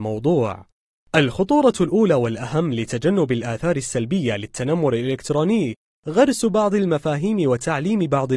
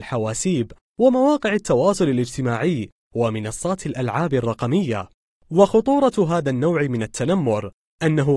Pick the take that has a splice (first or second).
first